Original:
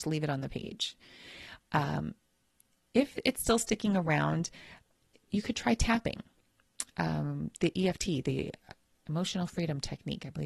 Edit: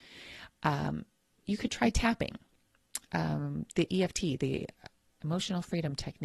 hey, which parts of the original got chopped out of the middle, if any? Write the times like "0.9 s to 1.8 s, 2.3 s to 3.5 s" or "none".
2.4 s to 5.2 s